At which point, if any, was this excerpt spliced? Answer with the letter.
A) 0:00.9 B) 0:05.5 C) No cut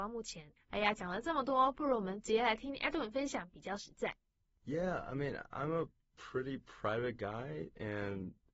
C